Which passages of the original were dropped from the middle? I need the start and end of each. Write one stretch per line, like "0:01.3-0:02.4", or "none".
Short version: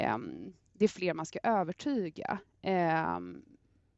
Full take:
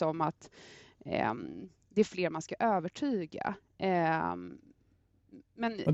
none